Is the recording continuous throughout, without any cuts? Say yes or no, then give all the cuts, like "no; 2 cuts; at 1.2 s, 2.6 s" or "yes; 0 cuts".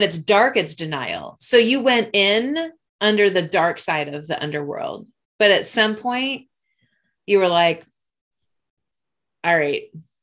yes; 0 cuts